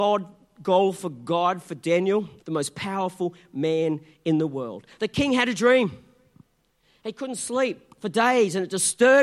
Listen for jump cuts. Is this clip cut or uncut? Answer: cut